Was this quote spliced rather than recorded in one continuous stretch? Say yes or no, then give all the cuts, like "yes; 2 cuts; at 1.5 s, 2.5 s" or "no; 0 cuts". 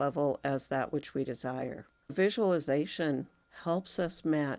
yes; 1 cut; at 2.0 s